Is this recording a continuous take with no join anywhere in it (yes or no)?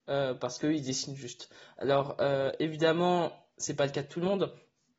yes